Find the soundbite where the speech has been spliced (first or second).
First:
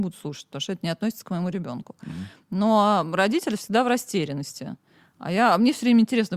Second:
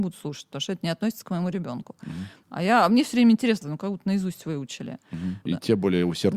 second